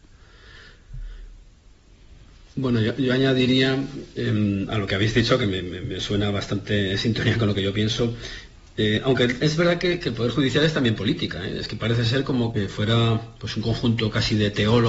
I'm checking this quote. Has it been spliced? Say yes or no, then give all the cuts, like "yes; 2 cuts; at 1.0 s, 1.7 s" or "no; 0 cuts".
no; 0 cuts